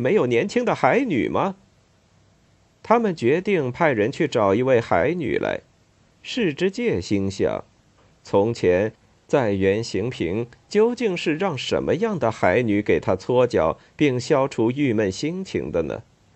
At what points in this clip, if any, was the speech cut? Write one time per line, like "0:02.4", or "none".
0:06.1